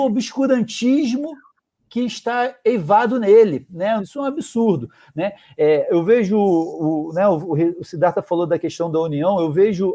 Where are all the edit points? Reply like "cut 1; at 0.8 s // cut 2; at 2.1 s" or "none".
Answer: cut 1; at 4.0 s